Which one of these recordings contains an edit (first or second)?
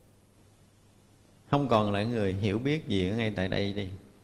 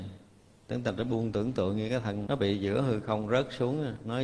second